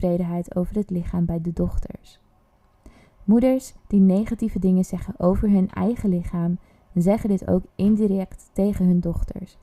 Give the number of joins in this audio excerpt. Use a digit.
0